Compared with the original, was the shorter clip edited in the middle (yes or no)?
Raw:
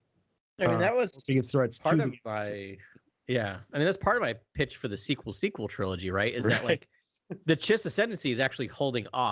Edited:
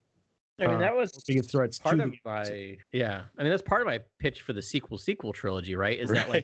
yes